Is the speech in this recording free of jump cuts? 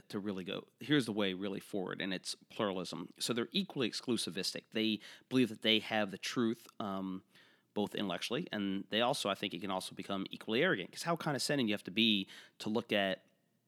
yes; 0 cuts

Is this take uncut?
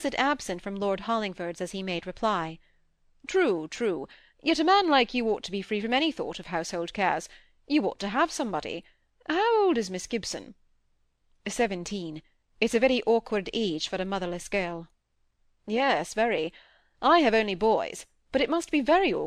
yes; 0 cuts

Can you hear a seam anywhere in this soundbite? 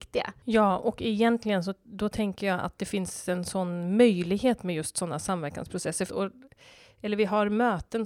yes; 1 cut; at 6.1 s

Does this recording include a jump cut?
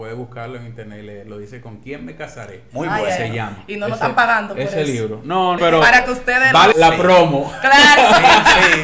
yes; 2 cuts; at 5.6 s, 6.7 s

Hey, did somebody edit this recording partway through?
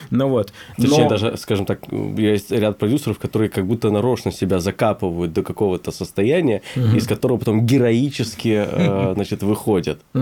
no; 0 cuts

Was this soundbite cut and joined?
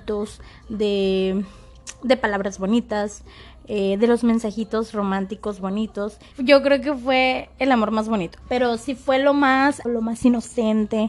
yes; 3 cuts; at 6.3 s, 8.4 s, 9.8 s

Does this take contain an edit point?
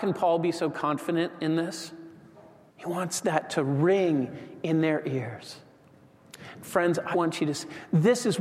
yes; 2 cuts; at 2.7 s, 7.1 s

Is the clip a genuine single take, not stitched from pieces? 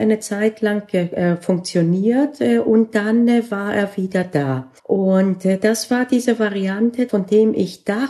no; 2 cuts; at 4.8 s, 7.1 s

